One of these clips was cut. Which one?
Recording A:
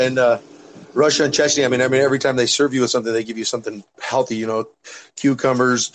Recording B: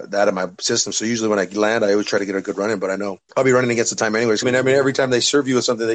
B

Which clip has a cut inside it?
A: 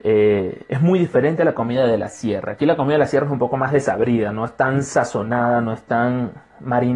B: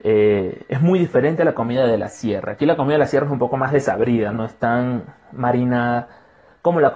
B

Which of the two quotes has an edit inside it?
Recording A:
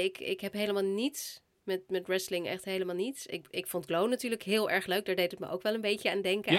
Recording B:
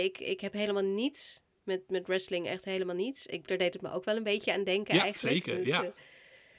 B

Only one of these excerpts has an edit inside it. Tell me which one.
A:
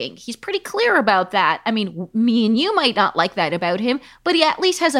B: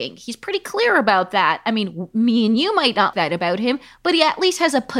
B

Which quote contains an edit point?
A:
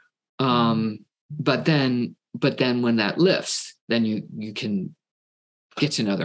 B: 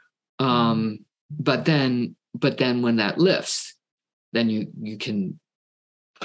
A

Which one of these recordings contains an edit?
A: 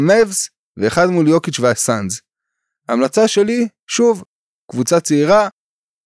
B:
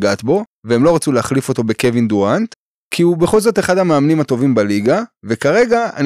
B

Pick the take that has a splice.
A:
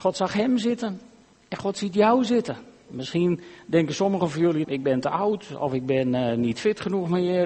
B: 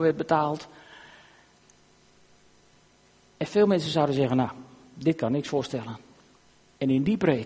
A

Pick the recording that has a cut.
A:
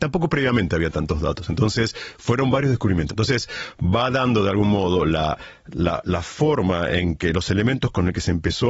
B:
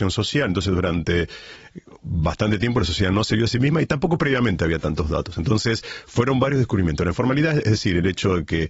A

